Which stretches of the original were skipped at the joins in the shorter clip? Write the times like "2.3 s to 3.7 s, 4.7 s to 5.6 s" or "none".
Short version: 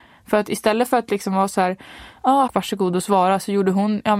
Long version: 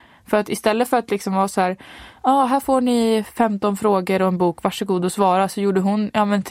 2.5 s to 4.6 s